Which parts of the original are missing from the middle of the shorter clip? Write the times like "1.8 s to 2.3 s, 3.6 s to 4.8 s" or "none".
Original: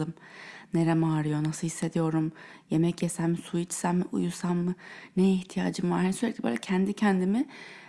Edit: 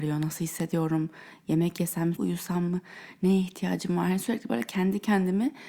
3.4 s to 4.1 s